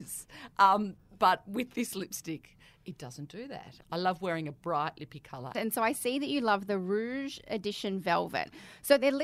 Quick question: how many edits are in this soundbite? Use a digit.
2